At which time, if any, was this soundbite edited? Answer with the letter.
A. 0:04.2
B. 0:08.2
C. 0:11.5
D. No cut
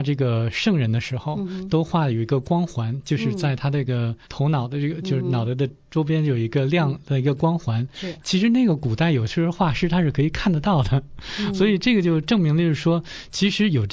A